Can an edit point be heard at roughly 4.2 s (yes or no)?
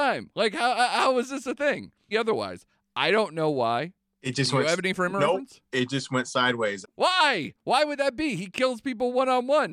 no